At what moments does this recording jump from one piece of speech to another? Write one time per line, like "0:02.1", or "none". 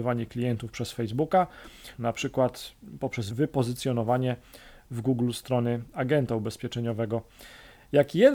0:01.9